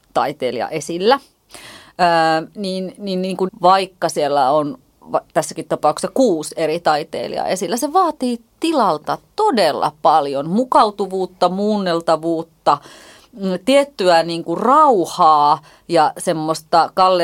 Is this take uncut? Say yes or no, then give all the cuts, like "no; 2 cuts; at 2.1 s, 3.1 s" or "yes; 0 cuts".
no; 1 cut; at 3.5 s